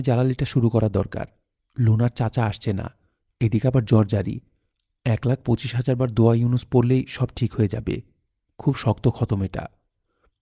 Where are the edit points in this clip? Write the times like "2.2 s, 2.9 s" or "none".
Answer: none